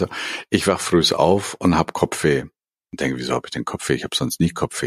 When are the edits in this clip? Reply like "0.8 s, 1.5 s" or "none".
none